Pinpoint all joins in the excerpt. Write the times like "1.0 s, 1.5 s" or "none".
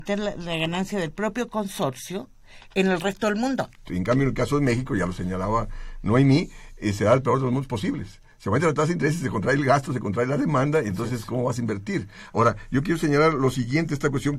3.9 s